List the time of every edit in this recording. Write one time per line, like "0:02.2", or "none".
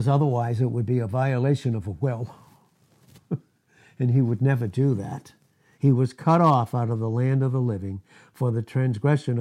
0:05.8